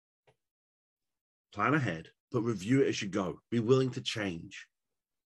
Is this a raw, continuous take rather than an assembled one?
no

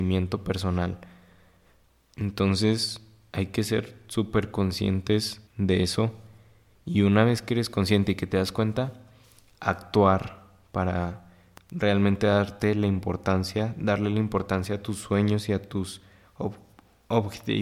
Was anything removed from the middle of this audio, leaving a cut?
yes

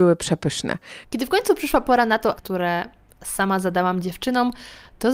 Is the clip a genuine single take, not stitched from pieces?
no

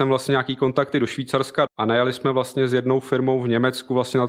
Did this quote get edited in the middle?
yes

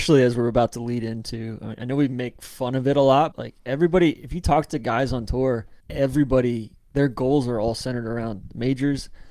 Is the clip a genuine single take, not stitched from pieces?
no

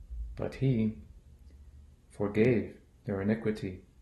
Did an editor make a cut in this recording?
yes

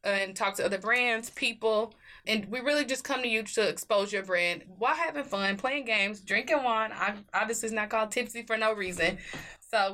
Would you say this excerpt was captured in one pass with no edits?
yes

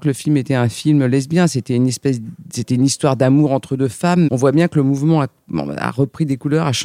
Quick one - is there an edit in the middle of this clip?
yes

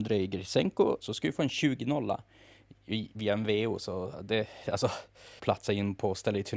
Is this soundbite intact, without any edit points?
no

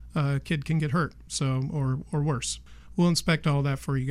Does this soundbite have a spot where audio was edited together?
no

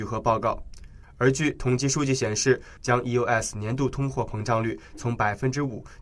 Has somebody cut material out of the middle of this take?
yes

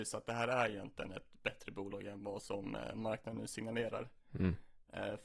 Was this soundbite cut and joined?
no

